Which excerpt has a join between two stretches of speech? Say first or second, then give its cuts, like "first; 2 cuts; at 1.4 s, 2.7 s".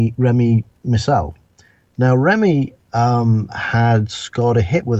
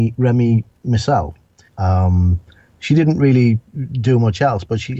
second; 1 cut; at 1.7 s